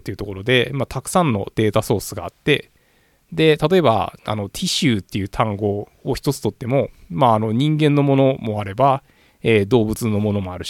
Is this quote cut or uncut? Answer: uncut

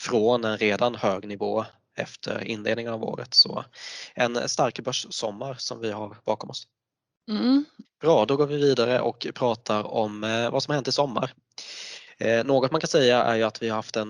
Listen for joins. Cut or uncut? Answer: cut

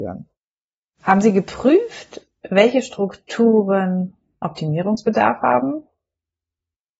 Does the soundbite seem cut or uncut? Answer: cut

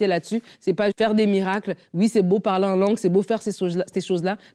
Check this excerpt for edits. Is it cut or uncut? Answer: cut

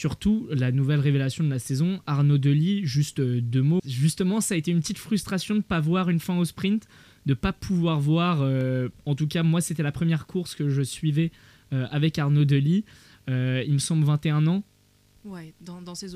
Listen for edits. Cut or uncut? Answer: cut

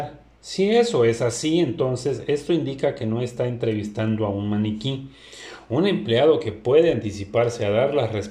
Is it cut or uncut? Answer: uncut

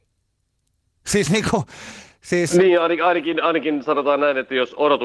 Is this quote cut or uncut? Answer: uncut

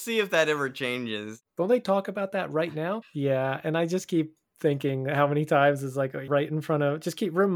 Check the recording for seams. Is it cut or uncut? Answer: cut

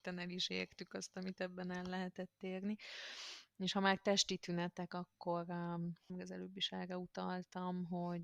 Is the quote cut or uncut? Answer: cut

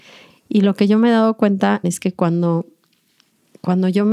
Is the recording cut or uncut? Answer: cut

